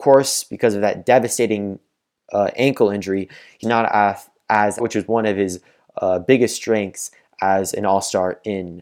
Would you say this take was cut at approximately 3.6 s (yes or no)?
yes